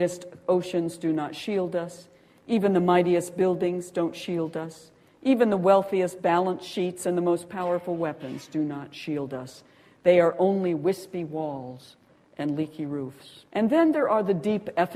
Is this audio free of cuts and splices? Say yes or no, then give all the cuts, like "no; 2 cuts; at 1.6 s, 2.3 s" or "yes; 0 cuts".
no; 1 cut; at 13.5 s